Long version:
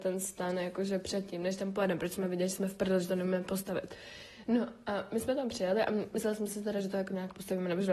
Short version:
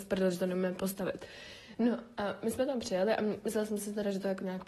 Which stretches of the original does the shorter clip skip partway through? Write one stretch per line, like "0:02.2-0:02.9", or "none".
none